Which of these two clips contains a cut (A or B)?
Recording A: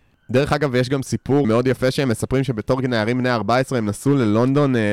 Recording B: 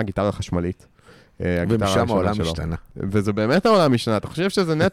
A